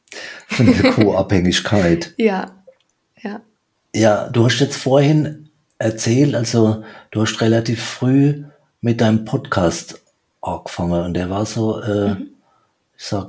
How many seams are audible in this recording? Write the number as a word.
zero